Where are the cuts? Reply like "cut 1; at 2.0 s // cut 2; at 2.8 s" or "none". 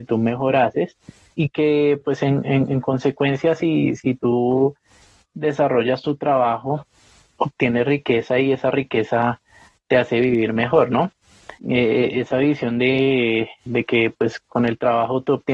cut 1; at 11.6 s // cut 2; at 13.7 s